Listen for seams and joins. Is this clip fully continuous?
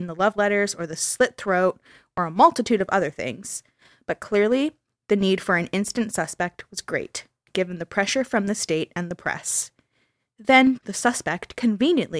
no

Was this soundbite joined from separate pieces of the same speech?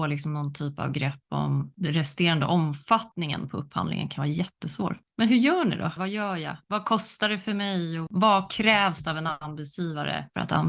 yes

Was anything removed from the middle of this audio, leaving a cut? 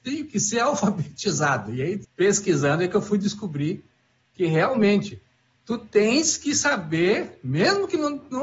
yes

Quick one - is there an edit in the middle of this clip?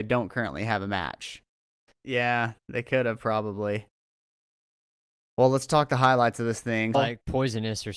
yes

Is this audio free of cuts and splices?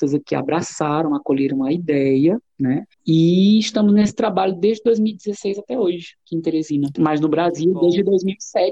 no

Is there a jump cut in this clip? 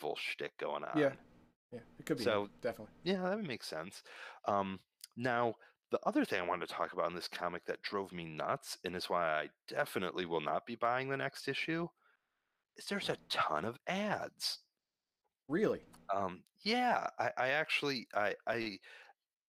no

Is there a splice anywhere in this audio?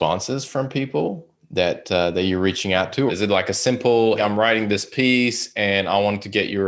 yes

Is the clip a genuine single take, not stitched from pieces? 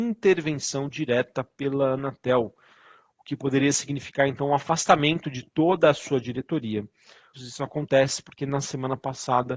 no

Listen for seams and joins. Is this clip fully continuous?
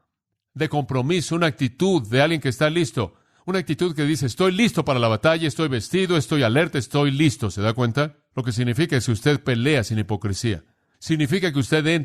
yes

